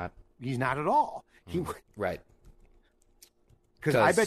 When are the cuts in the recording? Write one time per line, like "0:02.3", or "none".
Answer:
0:01.9